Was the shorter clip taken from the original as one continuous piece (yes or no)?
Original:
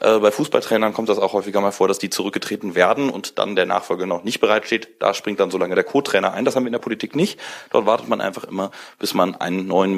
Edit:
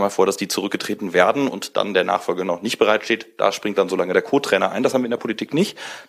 yes